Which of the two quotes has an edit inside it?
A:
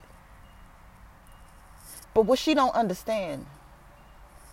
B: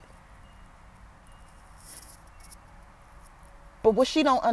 A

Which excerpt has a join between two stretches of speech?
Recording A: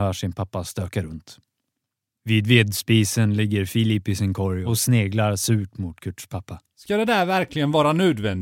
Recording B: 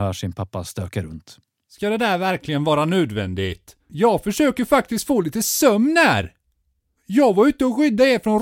B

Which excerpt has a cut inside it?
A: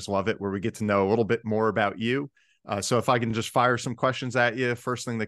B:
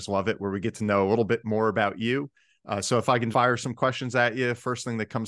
B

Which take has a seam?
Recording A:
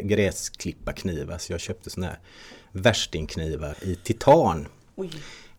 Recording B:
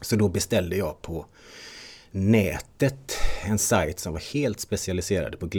A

